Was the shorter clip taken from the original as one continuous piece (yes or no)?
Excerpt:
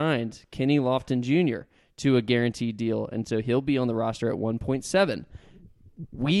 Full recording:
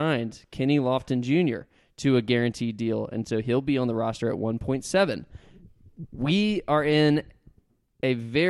yes